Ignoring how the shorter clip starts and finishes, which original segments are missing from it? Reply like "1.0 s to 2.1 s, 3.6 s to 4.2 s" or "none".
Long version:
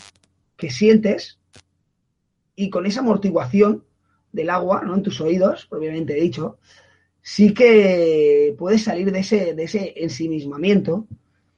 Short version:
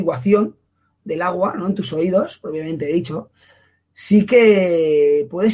none